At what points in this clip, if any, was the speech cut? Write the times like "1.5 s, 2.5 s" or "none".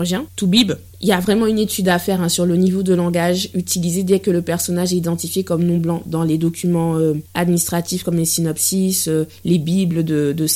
7.3 s